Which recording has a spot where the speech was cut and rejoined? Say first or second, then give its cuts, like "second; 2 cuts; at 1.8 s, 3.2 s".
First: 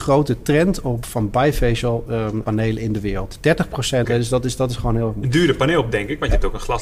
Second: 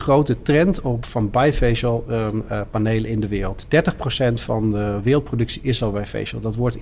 first; 2 cuts; at 2.4 s, 4.0 s